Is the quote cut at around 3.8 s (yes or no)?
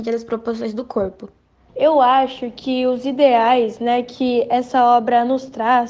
no